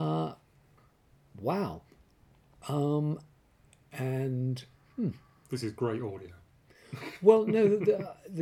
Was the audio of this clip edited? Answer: no; 0 cuts

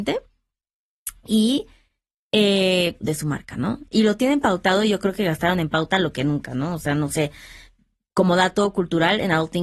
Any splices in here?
yes; 1 cut; at 3.0 s

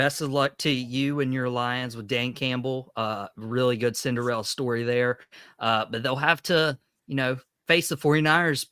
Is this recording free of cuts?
yes; 0 cuts

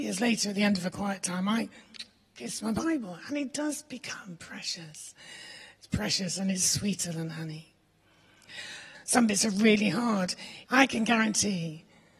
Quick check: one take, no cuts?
no; 2 cuts; at 8.9 s, 10.7 s

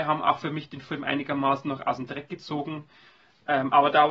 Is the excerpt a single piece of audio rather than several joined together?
yes; 0 cuts

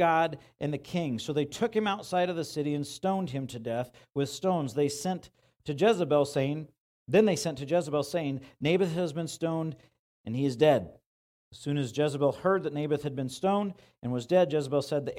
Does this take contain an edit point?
no; 0 cuts

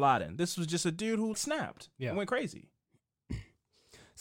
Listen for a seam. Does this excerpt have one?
yes; 1 cut; at 1.3 s

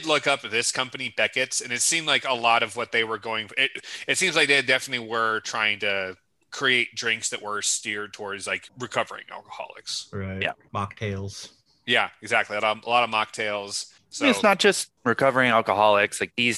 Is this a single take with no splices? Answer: no; 1 cut; at 15.0 s

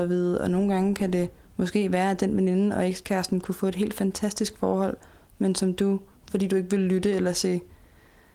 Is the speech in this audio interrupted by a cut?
no; 0 cuts

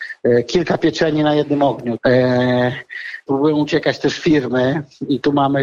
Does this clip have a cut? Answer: yes; 2 cuts; at 2.0 s, 3.3 s

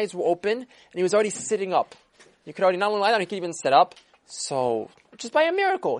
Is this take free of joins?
no; 1 cut; at 4.1 s

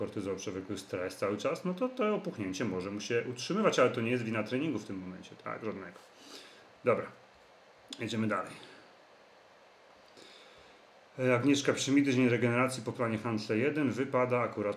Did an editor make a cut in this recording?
no; 0 cuts

